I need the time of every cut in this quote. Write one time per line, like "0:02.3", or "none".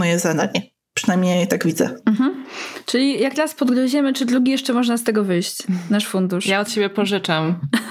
none